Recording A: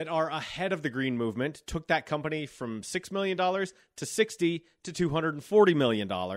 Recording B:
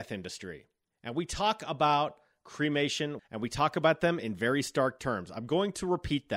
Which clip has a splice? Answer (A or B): B